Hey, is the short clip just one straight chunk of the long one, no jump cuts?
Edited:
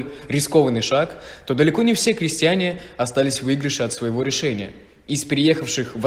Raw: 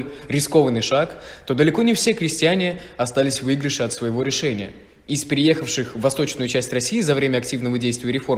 yes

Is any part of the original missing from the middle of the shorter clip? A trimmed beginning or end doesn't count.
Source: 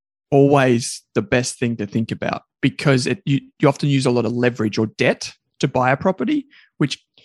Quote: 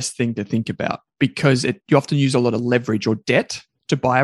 yes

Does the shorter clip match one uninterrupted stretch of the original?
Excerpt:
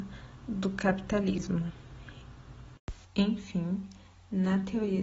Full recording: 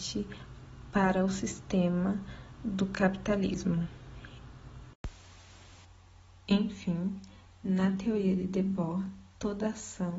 no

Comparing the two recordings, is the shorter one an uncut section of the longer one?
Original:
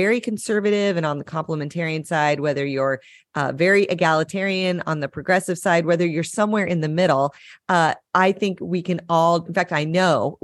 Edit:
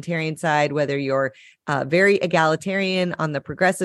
yes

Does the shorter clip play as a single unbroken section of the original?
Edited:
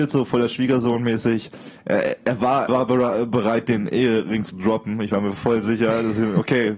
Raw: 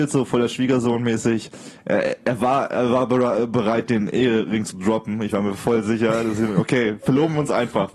no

